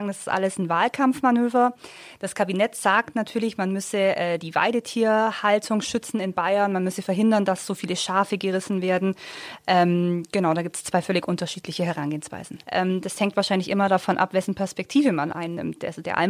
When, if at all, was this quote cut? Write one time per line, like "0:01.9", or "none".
0:12.6